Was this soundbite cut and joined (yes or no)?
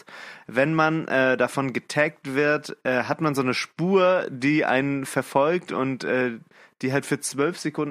no